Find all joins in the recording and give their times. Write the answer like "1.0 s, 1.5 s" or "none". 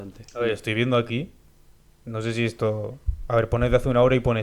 none